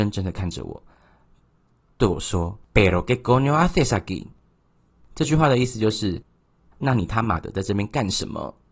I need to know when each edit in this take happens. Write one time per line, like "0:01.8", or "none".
0:02.6